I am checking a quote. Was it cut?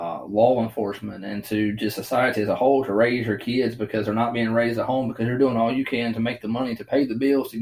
no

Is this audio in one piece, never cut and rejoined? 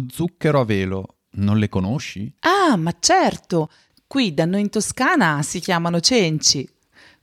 yes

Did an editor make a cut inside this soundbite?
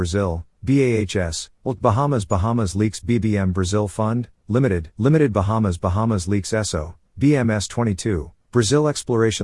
yes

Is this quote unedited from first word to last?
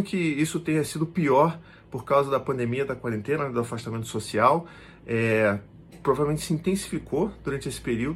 yes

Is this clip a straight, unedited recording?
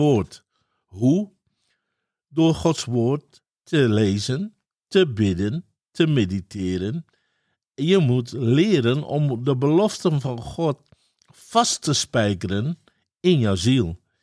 yes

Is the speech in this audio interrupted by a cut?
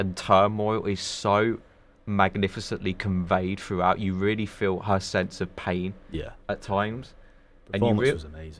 no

